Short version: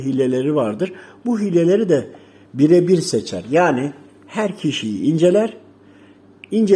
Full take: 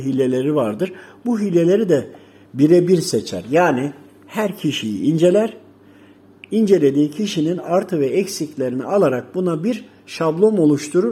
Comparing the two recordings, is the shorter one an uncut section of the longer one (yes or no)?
yes